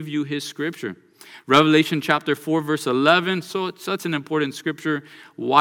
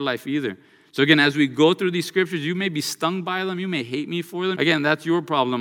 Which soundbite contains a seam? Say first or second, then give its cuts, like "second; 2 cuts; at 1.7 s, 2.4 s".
second; 1 cut; at 4.5 s